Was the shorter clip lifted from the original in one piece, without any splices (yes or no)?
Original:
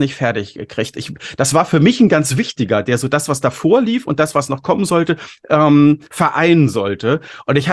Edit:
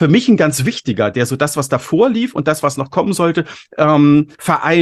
yes